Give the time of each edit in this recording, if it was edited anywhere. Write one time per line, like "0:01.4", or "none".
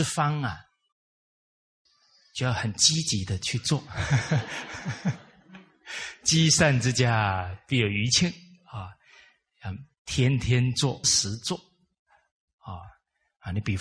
0:11.0